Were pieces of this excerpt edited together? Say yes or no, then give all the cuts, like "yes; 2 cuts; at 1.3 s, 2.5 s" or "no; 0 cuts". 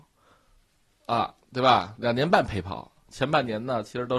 no; 0 cuts